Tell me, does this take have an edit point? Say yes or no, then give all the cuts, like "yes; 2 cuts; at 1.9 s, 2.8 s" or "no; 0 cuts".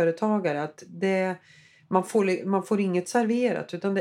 no; 0 cuts